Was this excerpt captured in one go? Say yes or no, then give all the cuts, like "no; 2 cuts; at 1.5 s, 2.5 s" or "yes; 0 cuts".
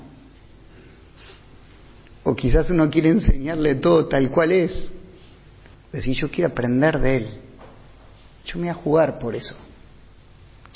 no; 2 cuts; at 5.7 s, 8.4 s